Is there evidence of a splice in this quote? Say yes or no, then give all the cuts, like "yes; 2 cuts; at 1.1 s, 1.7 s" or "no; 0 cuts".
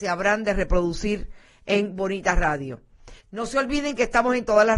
yes; 1 cut; at 3.2 s